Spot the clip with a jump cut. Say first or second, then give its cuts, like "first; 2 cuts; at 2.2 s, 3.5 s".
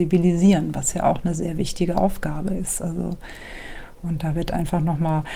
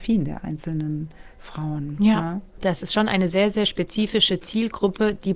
second; 1 cut; at 2.6 s